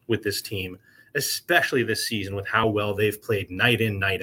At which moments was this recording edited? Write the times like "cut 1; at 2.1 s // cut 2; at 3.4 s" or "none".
none